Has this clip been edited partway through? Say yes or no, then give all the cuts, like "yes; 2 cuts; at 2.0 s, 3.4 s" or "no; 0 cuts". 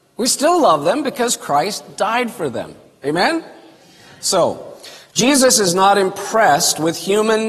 no; 0 cuts